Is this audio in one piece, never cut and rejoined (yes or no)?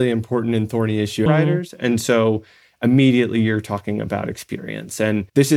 no